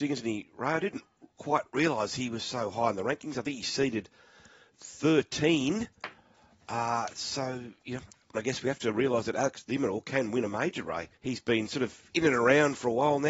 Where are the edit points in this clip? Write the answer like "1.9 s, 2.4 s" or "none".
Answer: 8.3 s, 11.2 s